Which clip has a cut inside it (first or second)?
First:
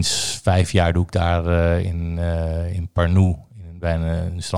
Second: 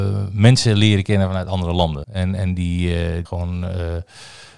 second